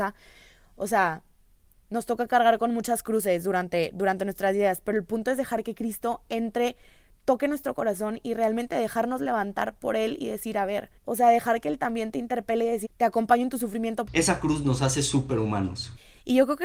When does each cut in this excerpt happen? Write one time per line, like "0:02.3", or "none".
0:11.0
0:12.8
0:14.1